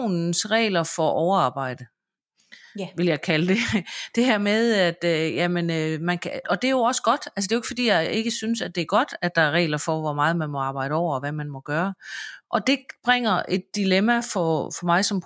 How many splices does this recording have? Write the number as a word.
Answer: two